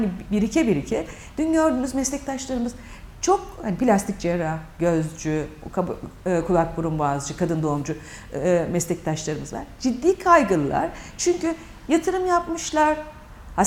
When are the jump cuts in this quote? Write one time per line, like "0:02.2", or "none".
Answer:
none

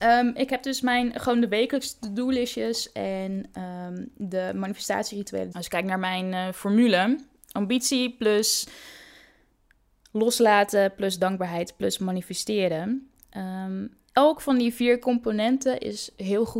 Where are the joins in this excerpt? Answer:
0:05.5

